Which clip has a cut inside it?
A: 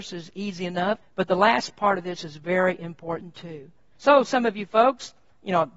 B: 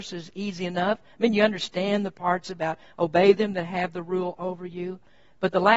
A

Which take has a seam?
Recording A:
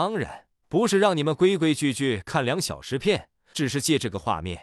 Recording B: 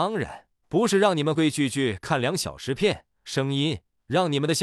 B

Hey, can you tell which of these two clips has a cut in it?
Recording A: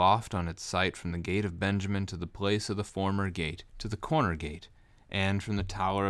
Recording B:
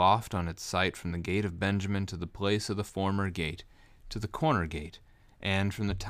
A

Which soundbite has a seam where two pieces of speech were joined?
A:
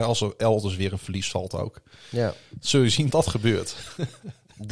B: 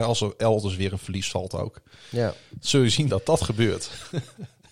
A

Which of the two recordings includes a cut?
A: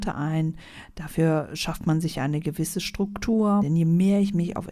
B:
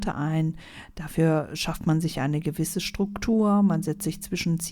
A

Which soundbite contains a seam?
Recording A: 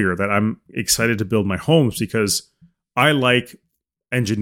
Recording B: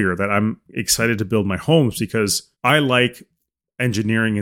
B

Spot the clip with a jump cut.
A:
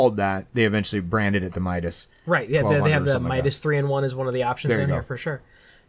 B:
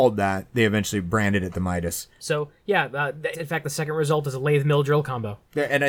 B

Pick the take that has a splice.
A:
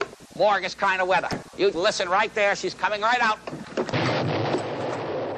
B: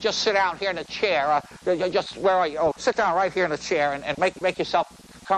A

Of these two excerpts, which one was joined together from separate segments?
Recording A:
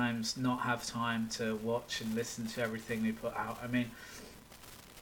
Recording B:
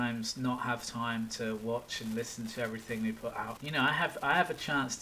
B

